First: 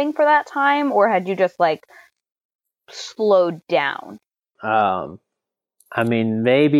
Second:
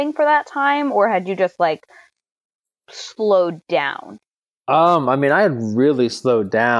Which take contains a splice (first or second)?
first